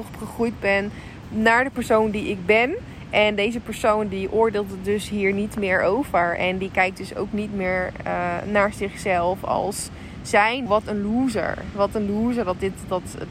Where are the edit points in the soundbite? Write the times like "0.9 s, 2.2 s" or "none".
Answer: 10.7 s